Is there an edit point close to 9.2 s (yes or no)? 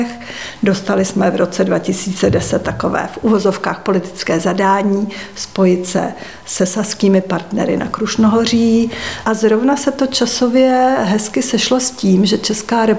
yes